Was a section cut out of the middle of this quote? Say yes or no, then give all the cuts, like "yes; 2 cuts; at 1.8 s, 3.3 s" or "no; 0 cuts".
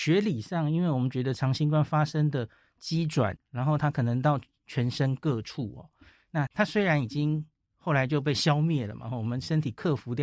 yes; 2 cuts; at 3.4 s, 6.5 s